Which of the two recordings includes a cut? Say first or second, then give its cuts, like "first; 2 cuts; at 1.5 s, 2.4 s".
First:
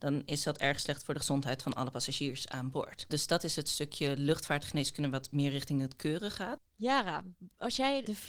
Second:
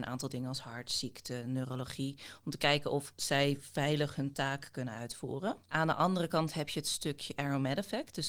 first; 1 cut; at 6.6 s